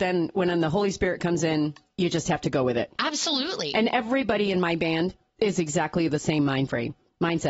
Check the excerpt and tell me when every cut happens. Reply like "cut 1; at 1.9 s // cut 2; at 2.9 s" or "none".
none